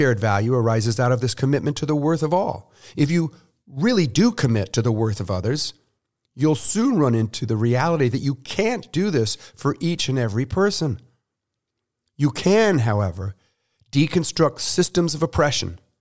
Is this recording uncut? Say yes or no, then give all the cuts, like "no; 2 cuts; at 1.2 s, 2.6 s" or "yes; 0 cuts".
yes; 0 cuts